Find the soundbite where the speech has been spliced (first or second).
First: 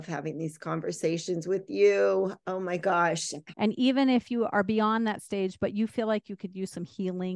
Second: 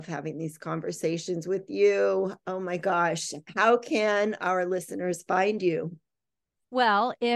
first